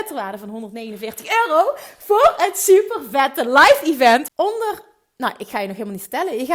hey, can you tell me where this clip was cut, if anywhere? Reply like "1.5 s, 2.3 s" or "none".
4.3 s

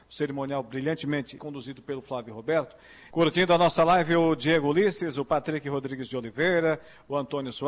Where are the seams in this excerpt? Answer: 1.4 s, 3.1 s

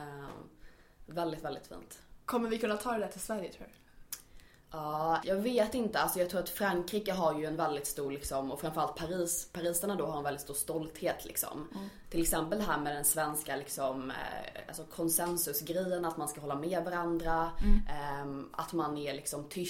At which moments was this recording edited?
5.2 s, 12.0 s

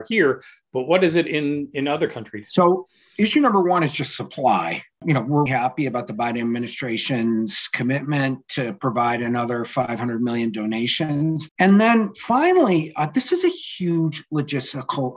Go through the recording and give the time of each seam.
5.5 s, 11.5 s

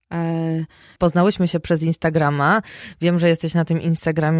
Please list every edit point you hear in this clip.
1.0 s

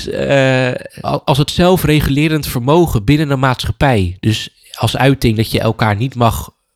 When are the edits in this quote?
1.0 s

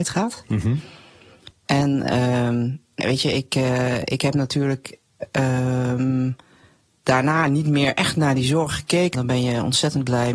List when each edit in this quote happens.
3.0 s, 9.1 s

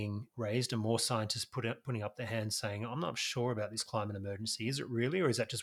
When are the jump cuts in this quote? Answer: none

